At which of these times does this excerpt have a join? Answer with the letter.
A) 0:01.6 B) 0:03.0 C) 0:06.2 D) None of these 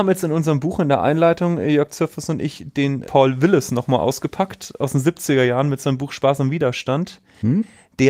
B